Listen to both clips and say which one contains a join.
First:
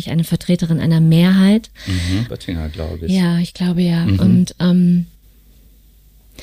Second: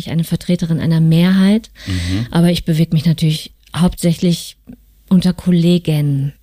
first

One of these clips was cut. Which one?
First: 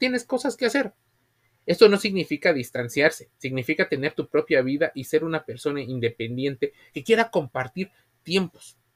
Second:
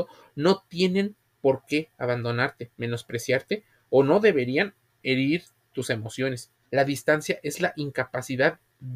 second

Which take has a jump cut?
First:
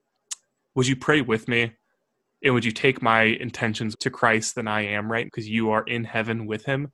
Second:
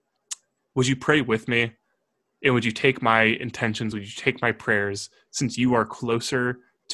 first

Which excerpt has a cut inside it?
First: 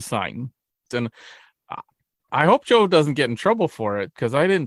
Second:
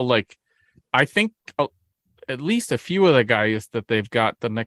first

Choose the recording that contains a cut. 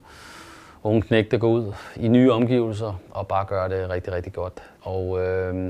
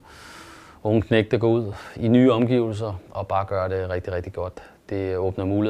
first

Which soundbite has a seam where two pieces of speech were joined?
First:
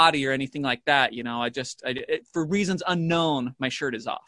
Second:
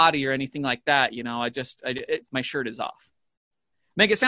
second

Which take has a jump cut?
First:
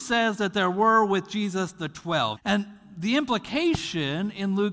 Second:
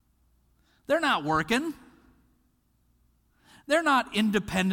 first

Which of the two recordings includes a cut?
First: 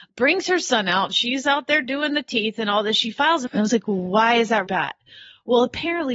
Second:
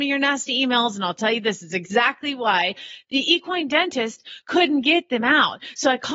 first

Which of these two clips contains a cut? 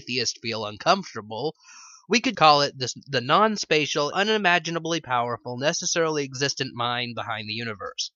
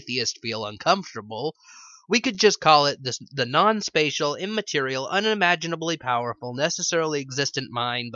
first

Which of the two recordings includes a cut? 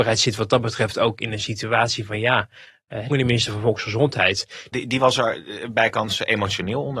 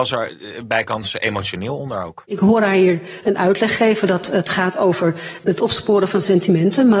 first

